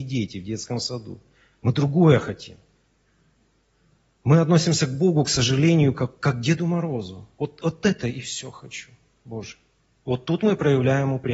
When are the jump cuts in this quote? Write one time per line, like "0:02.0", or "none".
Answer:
none